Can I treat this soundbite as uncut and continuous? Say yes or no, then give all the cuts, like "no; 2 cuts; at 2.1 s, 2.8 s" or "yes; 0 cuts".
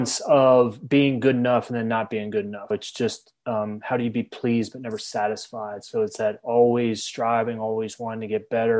no; 1 cut; at 2.7 s